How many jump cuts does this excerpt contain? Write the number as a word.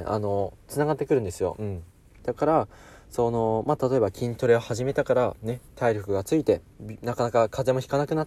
one